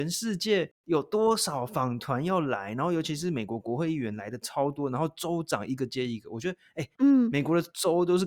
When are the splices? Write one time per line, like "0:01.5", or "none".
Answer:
0:07.0

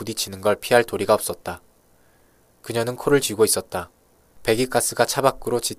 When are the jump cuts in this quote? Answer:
0:02.5
0:04.4

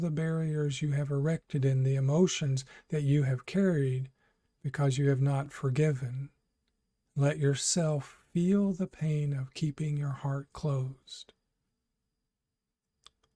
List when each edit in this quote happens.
0:07.1

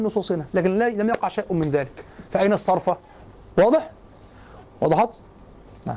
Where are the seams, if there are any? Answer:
0:03.5
0:04.6

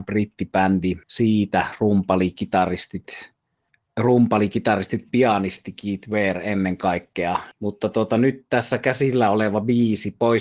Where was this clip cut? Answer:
0:01.0
0:07.5

